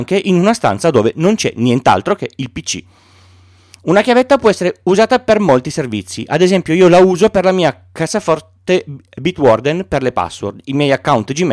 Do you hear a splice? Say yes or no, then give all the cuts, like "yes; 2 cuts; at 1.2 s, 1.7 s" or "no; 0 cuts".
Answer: no; 0 cuts